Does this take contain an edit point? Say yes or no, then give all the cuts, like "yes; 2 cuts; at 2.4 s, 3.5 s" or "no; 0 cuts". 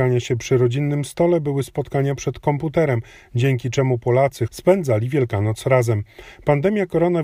yes; 1 cut; at 4.5 s